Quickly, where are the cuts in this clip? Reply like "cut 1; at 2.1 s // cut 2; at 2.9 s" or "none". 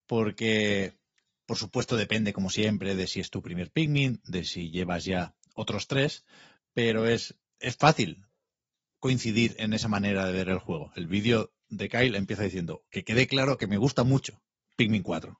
none

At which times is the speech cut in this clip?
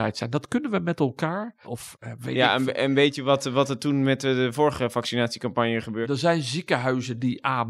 cut 1; at 1.6 s // cut 2; at 6.0 s

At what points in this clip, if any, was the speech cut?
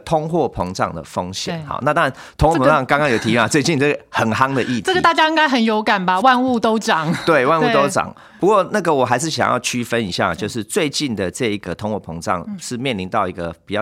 none

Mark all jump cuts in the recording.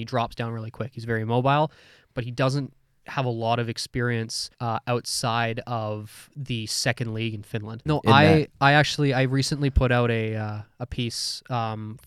cut 1; at 4.5 s // cut 2; at 7.9 s

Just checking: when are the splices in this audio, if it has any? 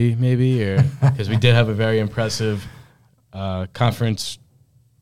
none

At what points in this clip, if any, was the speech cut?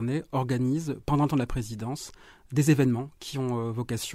none

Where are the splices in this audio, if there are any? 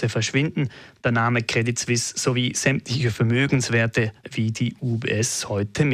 cut 1; at 4.2 s

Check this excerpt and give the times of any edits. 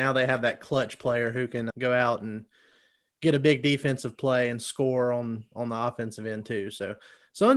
cut 1; at 1.7 s

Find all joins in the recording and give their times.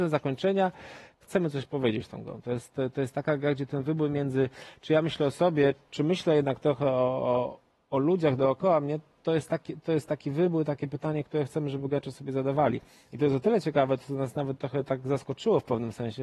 cut 1; at 1.2 s

